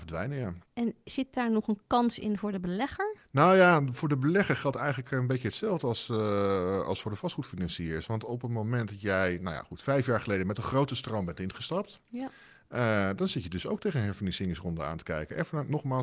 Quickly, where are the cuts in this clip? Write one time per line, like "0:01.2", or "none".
none